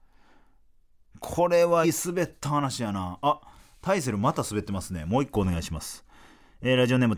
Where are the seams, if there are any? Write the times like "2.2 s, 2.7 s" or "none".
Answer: 1.8 s